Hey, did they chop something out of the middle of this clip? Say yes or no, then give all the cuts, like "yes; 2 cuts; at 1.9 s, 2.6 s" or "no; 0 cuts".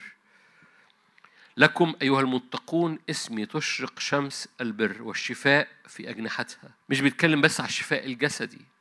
yes; 1 cut; at 6.8 s